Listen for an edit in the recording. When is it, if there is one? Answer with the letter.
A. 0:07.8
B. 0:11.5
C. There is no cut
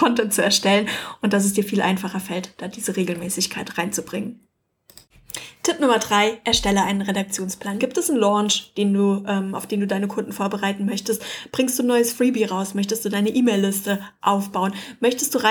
A